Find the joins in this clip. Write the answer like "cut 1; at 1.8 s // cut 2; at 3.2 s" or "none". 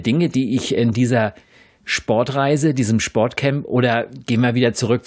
none

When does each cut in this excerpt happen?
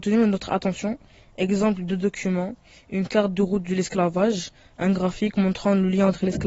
none

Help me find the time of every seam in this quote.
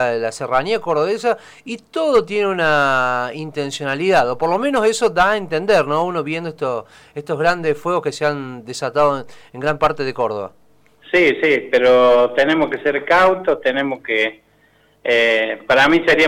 none

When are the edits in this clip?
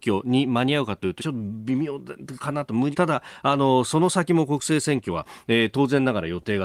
cut 1; at 1.2 s // cut 2; at 2.9 s

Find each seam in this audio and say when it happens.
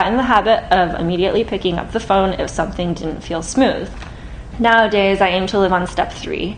cut 1; at 4.5 s

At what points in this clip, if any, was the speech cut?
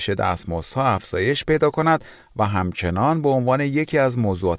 none

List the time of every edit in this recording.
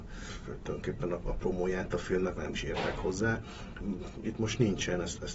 cut 1; at 2.4 s // cut 2; at 4.2 s

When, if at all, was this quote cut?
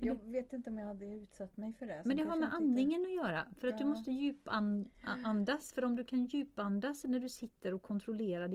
none

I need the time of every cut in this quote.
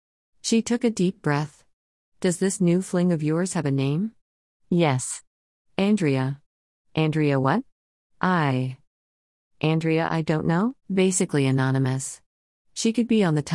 cut 1; at 10.8 s

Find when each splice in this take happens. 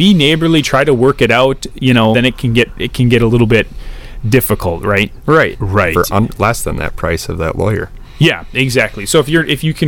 cut 1; at 2.1 s // cut 2; at 5.5 s

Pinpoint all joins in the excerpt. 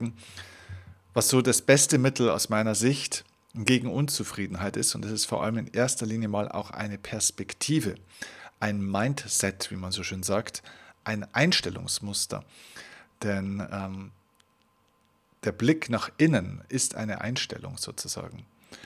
none

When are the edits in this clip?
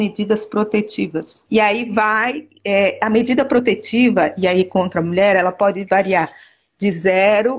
cut 1; at 1.5 s

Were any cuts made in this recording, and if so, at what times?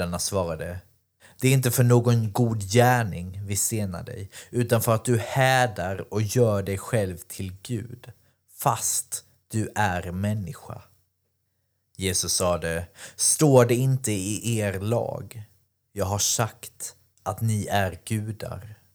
none

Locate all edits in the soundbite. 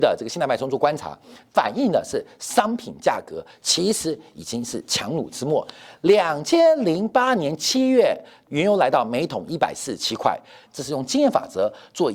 cut 1; at 8.5 s // cut 2; at 10.7 s

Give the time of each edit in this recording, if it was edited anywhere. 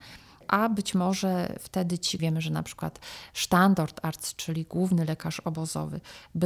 cut 1; at 2.2 s

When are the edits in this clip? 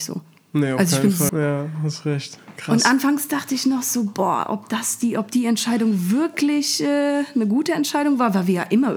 cut 1; at 1.3 s

